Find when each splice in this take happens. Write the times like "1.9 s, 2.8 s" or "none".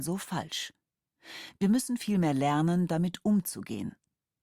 none